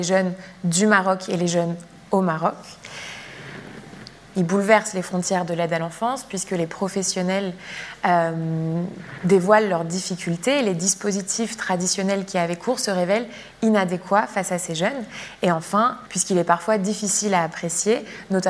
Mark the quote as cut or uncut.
cut